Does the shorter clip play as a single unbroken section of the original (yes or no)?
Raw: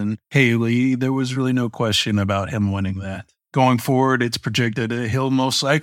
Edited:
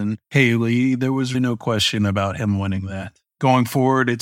no